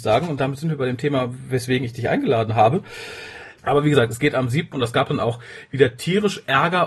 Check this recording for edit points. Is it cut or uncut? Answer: cut